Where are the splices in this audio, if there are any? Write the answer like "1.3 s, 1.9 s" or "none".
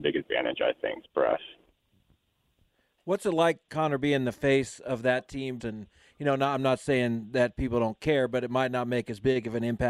1.0 s, 5.6 s